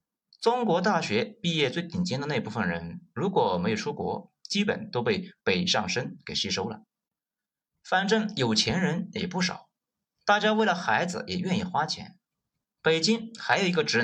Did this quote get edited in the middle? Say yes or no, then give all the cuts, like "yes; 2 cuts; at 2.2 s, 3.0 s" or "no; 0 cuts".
no; 0 cuts